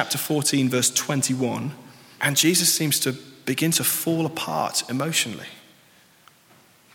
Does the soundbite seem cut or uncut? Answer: cut